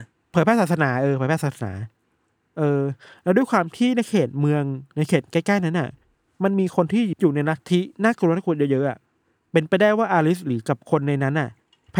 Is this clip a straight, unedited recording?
yes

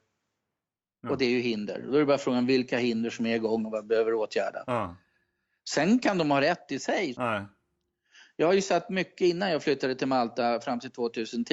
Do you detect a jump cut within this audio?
yes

